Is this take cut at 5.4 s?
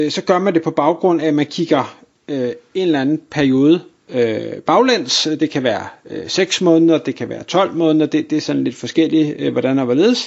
no; 0 cuts

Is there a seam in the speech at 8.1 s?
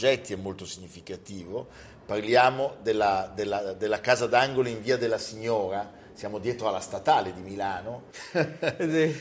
yes; 1 cut; at 8.1 s

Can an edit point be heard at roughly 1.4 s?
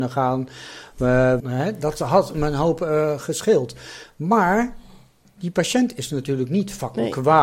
yes; 1 cut; at 1.4 s

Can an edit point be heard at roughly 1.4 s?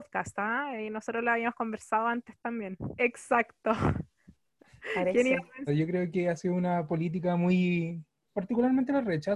no; 3 cuts; at 3.0 s, 5.7 s, 8.2 s

